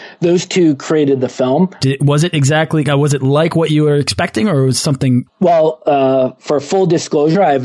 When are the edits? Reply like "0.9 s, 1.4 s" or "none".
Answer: 1.8 s, 5.3 s